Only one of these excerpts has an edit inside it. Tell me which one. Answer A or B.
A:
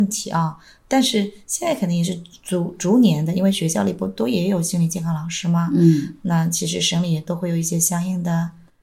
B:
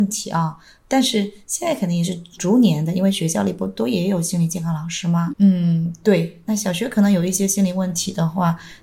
B